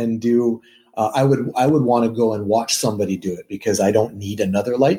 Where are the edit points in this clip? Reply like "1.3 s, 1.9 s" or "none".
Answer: none

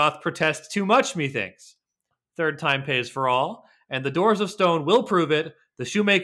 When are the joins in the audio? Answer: none

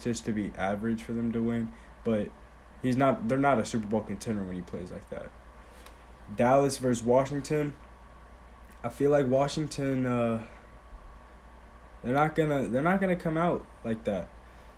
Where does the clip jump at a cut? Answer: none

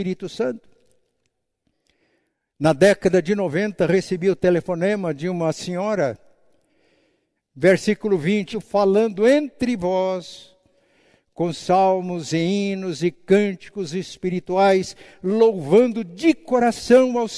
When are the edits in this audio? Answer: 7.4 s, 8.5 s

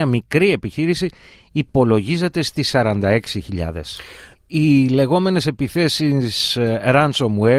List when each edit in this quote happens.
4.3 s

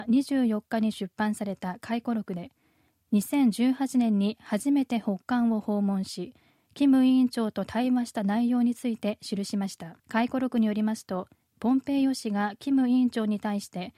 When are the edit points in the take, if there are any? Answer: 10.0 s

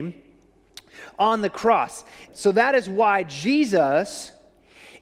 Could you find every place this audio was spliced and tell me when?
2.3 s

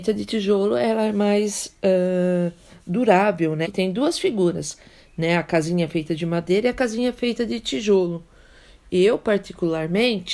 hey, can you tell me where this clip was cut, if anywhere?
3.6 s

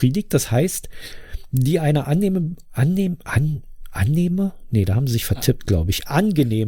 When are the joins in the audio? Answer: none

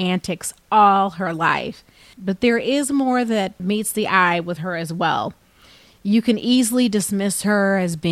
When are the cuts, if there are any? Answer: 2.1 s, 3.6 s

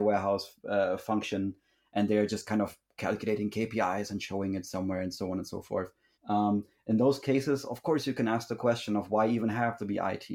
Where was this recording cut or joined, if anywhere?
6.1 s

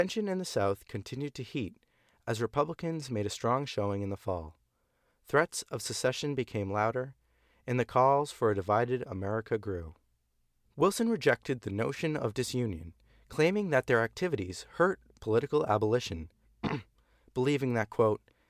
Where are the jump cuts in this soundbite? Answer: 10.6 s, 16.4 s

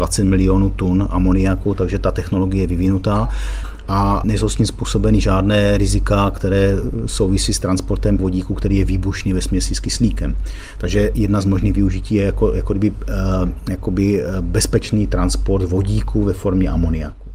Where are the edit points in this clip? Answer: none

